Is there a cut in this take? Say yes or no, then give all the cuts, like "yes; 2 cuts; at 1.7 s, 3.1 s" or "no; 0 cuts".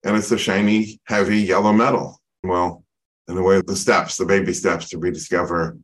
yes; 2 cuts; at 2.4 s, 3.6 s